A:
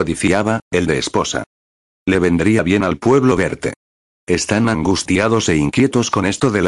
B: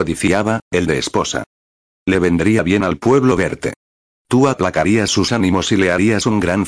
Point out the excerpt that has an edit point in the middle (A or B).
B